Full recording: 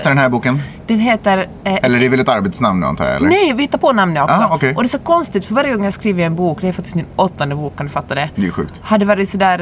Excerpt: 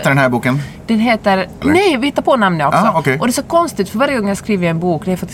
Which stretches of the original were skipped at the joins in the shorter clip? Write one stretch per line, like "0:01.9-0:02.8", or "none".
0:01.6-0:03.2